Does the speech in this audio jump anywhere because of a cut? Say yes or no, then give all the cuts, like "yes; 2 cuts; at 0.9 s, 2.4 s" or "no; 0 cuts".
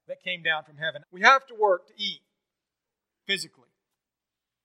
yes; 1 cut; at 1.0 s